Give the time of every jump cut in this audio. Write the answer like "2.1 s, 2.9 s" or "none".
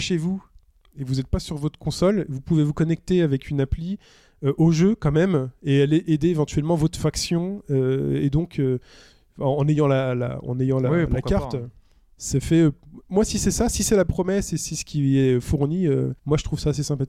16.2 s